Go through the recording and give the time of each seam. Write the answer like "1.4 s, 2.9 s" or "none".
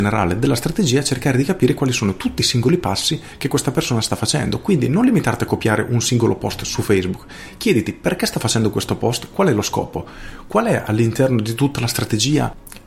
none